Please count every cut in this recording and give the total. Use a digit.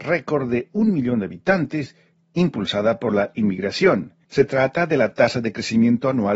1